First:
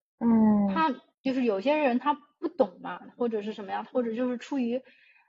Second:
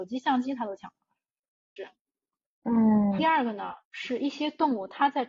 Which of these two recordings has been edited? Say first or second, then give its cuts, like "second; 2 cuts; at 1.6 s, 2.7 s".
second; 2 cuts; at 1.8 s, 3.2 s